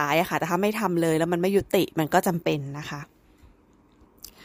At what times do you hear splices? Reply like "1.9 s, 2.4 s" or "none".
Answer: none